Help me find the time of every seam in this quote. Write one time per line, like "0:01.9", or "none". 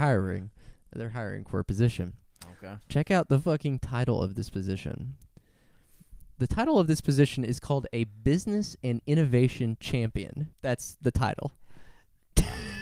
0:10.5

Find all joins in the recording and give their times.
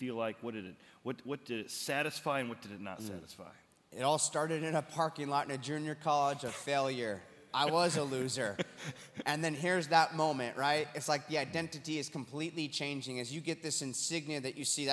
none

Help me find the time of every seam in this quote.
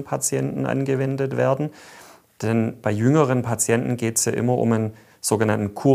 none

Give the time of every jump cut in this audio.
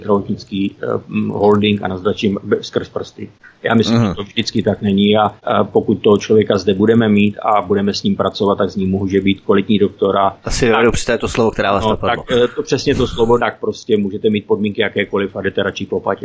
0:10.4
0:13.4

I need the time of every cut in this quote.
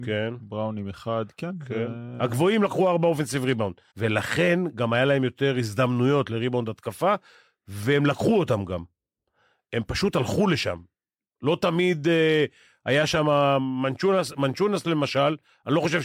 0:03.9

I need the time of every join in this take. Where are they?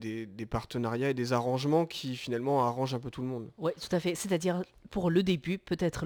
none

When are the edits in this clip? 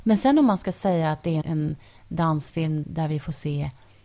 0:01.4
0:02.8

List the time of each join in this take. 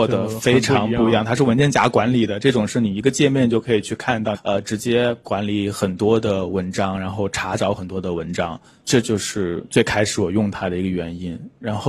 0:04.3

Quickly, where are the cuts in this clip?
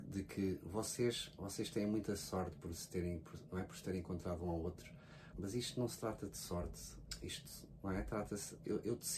0:05.3

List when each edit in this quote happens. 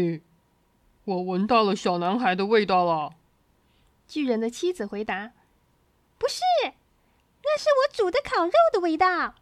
none

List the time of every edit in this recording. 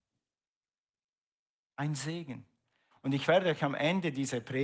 0:02.9

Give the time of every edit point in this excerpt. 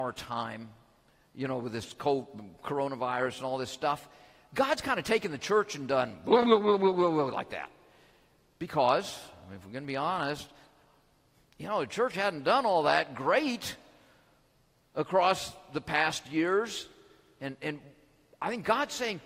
none

